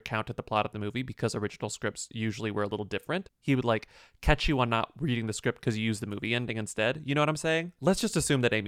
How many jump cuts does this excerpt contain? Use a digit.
1